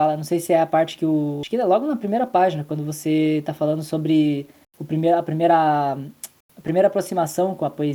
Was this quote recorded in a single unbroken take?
yes; 0 cuts

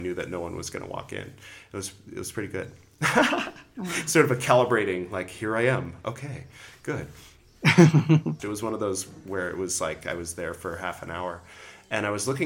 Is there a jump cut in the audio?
yes; 1 cut; at 8.4 s

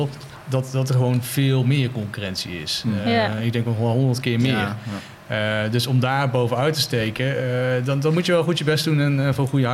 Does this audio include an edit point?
no; 0 cuts

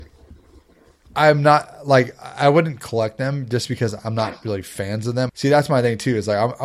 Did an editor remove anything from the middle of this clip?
yes; 1 cut; at 5.3 s

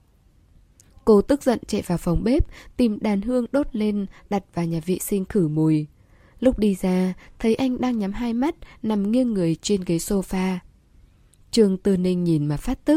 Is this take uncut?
yes; 0 cuts

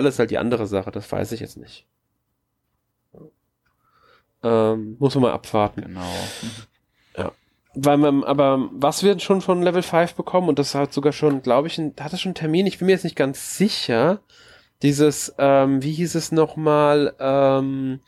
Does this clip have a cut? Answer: no; 0 cuts

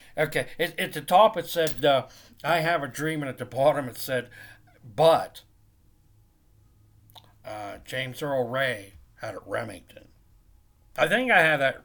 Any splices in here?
no; 0 cuts

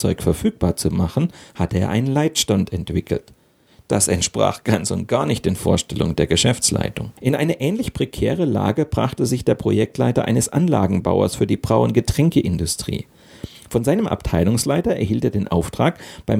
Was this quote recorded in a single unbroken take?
no; 1 cut; at 7.2 s

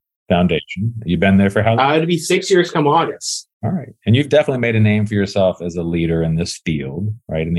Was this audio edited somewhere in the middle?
yes; 1 cut; at 3.5 s

